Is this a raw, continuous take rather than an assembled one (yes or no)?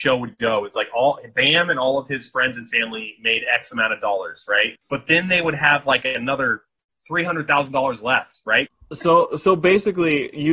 no